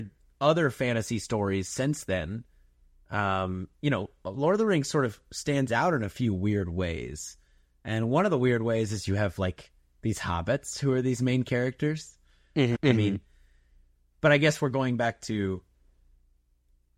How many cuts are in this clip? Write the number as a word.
one